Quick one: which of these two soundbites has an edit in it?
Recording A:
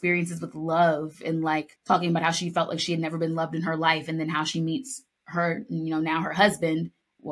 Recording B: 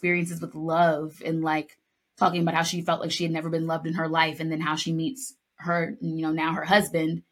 A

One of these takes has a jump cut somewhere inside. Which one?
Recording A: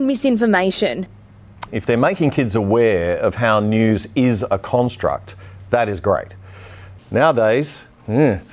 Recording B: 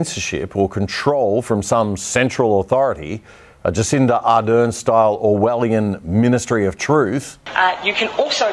A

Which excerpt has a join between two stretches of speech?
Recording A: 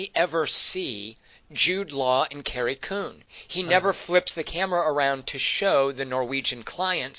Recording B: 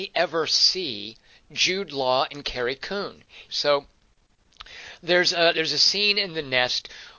B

